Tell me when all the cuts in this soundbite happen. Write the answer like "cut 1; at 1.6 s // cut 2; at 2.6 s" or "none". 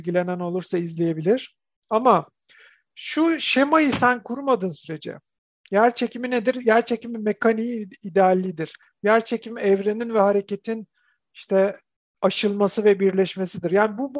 none